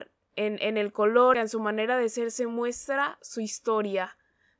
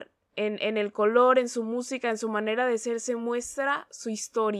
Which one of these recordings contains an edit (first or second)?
first